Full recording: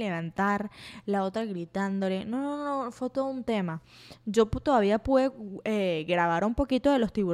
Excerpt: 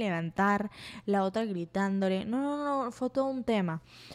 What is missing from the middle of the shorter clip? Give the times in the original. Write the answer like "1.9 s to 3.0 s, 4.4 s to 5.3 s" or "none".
none